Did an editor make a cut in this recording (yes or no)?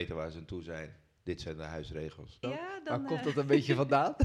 yes